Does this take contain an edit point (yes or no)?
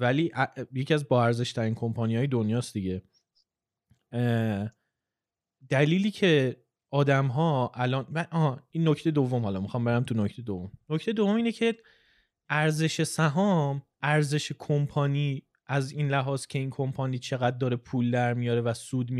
no